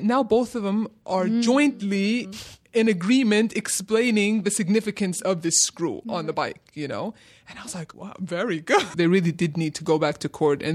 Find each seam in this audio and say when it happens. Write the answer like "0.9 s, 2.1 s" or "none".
7.9 s, 8.9 s